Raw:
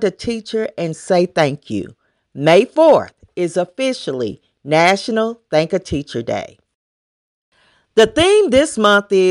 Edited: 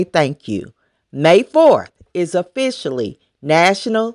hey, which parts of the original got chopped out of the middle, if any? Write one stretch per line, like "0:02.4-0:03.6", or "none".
none